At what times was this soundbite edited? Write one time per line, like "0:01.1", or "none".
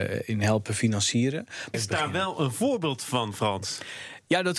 0:01.7